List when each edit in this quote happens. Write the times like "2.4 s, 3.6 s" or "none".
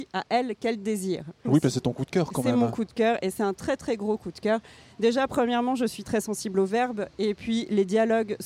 1.4 s